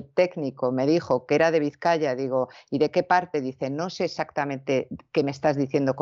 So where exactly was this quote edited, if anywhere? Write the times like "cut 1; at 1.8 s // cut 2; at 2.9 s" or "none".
none

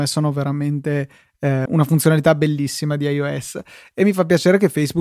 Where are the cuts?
cut 1; at 1.7 s

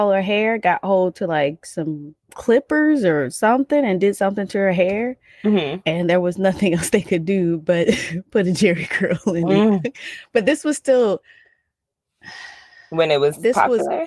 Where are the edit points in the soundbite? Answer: cut 1; at 2.2 s

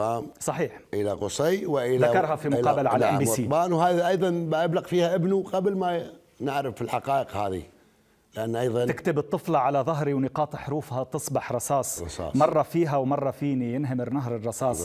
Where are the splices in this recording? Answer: none

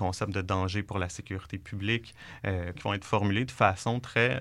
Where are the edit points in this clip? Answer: cut 1; at 2.8 s

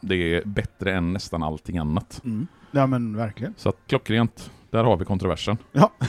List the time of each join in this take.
cut 1; at 3.9 s

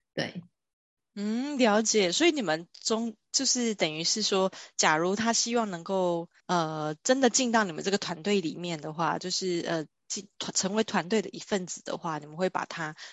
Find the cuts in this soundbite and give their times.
cut 1; at 6.4 s

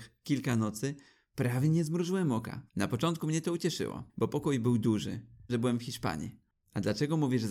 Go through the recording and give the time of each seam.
cut 1; at 2.7 s // cut 2; at 4.1 s // cut 3; at 5.5 s

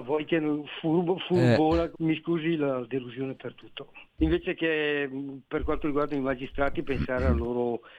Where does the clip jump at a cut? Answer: cut 1; at 1.9 s // cut 2; at 4.0 s

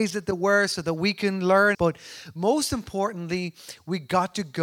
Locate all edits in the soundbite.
cut 1; at 1.7 s

